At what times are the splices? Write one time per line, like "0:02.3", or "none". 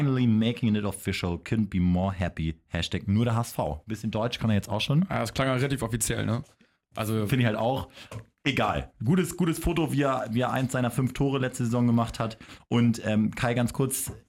none

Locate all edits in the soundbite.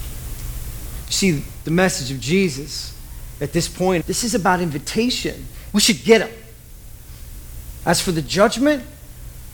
0:04.0
0:05.7
0:07.8

